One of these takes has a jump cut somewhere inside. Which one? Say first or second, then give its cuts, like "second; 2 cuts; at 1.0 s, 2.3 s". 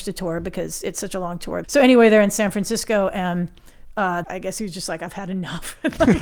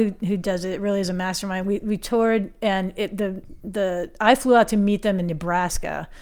first; 2 cuts; at 1.6 s, 4.2 s